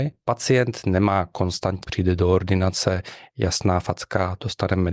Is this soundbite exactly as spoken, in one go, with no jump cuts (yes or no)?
no